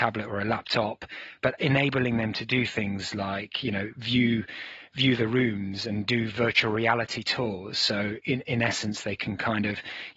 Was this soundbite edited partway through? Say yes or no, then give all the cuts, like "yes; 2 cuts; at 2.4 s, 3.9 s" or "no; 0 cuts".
no; 0 cuts